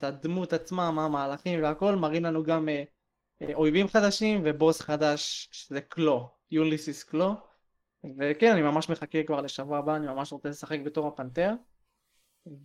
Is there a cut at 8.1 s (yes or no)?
no